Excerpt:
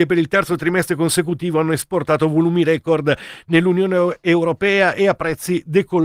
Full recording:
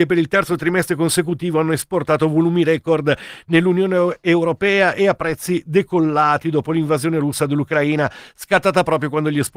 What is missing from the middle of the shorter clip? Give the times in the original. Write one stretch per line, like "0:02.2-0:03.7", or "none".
none